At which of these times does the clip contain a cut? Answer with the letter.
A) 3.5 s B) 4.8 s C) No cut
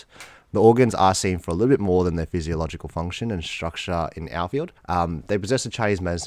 B